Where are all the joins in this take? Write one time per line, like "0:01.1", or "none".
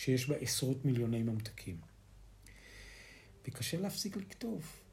0:03.3